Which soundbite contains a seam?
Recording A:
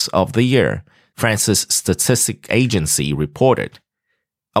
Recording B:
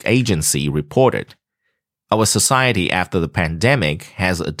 A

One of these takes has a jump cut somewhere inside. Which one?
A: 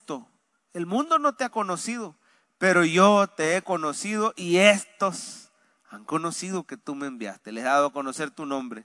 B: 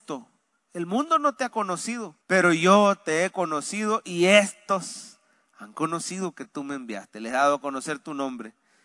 B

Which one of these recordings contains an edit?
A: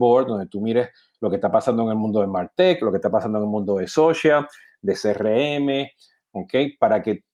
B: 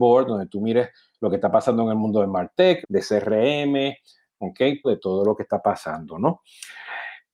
B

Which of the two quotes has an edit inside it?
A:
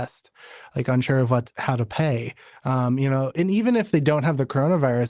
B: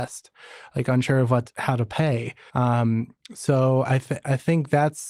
B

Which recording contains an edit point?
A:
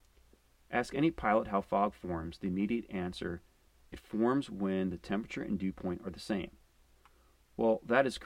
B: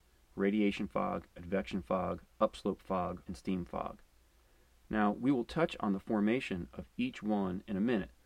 B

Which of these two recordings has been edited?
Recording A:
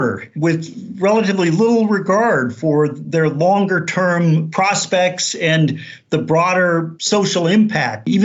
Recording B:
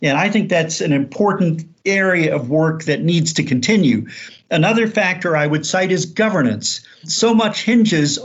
B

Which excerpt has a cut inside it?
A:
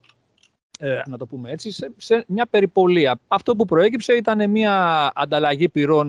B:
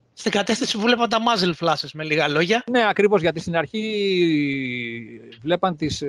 A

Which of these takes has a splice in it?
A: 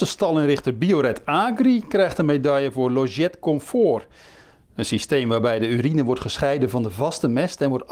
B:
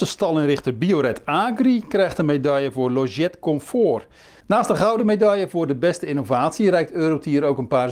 B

